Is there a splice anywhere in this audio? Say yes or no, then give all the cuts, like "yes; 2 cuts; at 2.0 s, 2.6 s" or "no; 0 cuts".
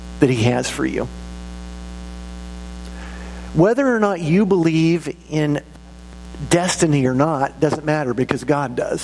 no; 0 cuts